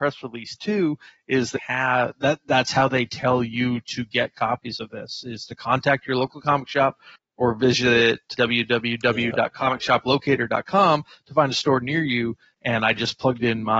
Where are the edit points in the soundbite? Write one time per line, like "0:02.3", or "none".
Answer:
0:01.6
0:08.3